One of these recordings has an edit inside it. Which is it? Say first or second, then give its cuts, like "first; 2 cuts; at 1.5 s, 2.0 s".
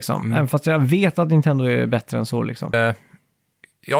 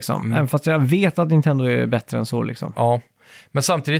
first; 1 cut; at 2.7 s